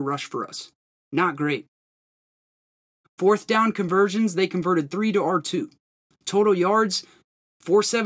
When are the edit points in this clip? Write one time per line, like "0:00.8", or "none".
0:03.0

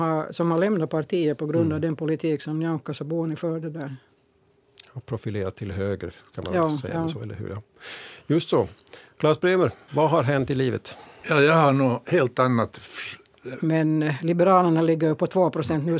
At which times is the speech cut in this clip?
0:09.9
0:13.6

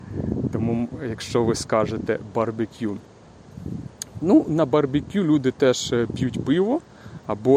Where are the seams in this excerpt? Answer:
none

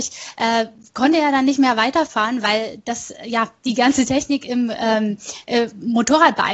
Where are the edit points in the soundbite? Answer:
none

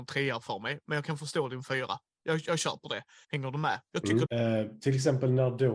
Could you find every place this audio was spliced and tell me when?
0:03.2
0:04.3

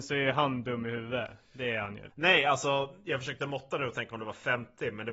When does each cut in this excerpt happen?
0:02.1

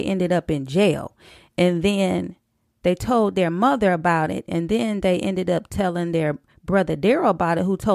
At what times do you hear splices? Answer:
none

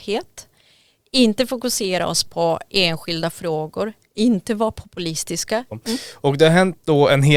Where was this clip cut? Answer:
0:05.7

